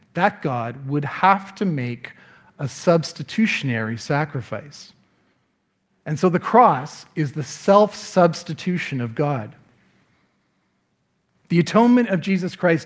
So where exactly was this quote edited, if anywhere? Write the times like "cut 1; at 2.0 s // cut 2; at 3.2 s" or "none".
none